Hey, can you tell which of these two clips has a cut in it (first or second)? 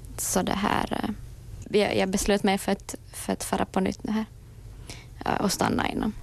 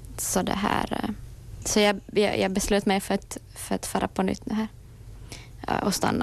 first